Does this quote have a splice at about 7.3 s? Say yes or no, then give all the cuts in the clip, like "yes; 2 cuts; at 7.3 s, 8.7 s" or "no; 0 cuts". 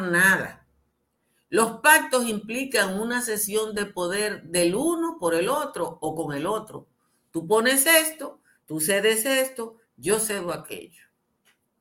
no; 1 cut; at 8.6 s